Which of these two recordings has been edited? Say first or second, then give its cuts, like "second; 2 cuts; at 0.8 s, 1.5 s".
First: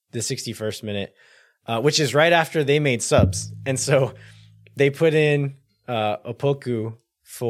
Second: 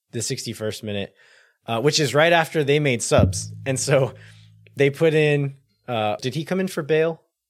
second; 1 cut; at 6.2 s